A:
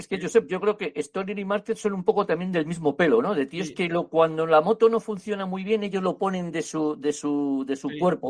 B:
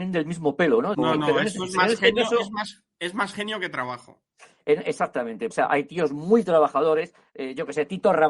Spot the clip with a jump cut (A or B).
B